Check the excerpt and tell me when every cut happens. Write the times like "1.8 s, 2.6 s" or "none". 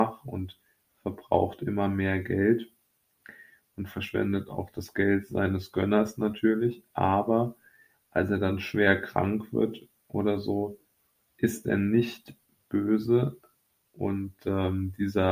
13.8 s